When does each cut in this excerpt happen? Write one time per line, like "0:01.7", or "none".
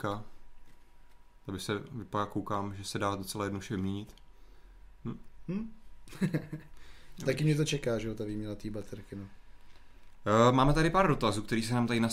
none